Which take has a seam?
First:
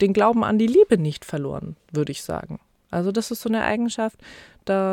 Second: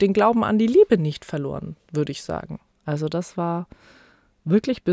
second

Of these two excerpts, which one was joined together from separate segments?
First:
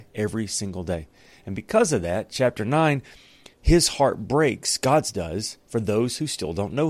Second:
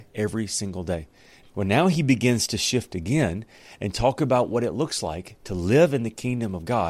second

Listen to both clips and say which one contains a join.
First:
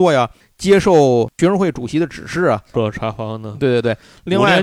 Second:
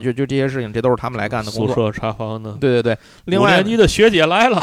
first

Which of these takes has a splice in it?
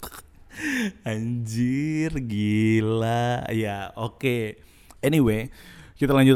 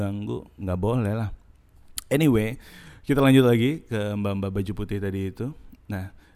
first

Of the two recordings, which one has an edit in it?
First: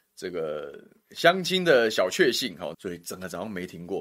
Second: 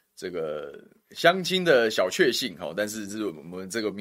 first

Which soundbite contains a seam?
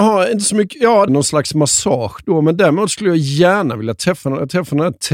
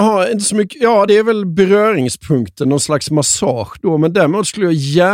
first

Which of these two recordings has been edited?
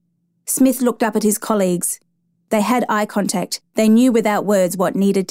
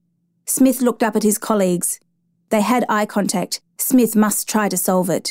second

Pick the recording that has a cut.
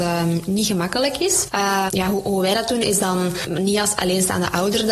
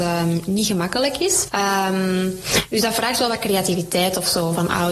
first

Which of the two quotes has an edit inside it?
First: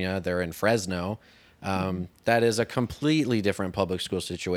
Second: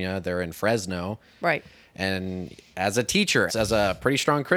second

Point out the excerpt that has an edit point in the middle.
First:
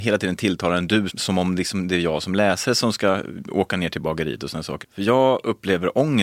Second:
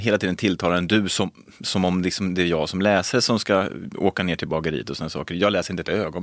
first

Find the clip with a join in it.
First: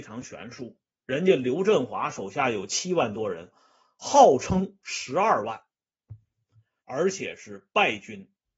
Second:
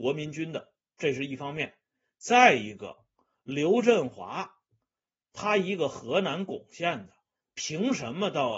first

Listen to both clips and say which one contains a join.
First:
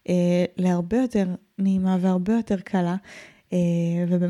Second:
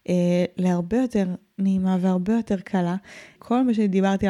second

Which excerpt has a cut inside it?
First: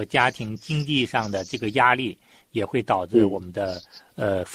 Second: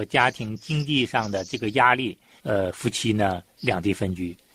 second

